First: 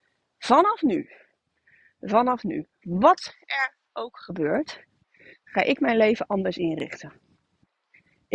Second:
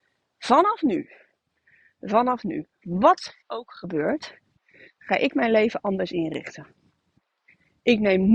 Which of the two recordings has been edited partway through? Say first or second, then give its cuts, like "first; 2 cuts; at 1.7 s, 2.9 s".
second; 1 cut; at 3.4 s